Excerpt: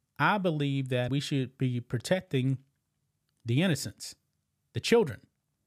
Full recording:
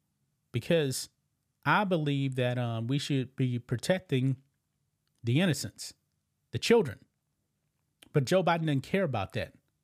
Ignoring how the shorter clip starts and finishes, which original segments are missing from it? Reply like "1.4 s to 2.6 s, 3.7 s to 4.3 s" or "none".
2.5 s to 2.9 s